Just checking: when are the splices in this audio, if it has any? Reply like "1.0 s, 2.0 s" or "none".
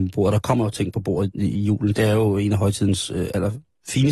1.3 s